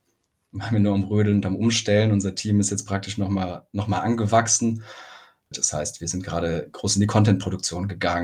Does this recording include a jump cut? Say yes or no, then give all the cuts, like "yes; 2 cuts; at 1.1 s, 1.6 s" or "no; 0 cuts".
yes; 1 cut; at 5.5 s